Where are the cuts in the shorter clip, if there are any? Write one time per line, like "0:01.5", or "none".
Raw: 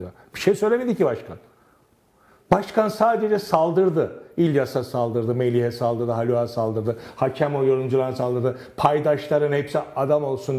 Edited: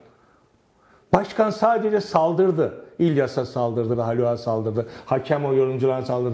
0:04.0